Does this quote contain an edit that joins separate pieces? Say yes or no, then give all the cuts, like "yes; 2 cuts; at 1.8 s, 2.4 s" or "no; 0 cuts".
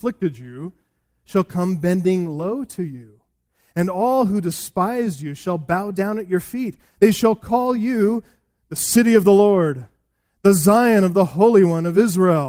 no; 0 cuts